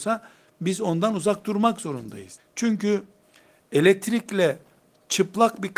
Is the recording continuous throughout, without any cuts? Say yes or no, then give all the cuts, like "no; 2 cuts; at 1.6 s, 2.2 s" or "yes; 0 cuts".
no; 1 cut; at 2.4 s